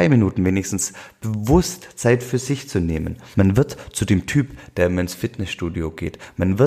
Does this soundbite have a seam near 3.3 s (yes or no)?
yes